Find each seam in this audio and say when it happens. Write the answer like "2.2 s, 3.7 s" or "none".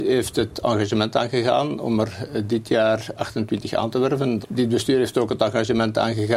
4.4 s